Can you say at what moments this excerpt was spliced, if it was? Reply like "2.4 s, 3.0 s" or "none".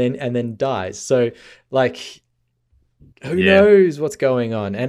3.1 s